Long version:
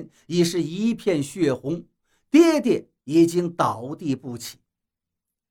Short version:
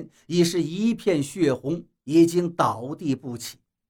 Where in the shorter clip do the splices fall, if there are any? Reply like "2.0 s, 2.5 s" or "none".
2.0 s